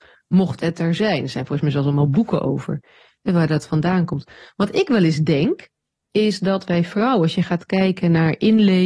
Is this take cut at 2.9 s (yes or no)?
no